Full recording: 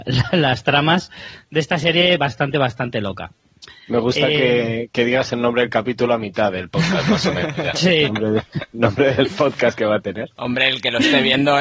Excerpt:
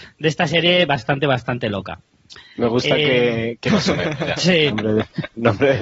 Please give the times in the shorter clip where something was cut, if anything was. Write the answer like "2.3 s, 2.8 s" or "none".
3.7 s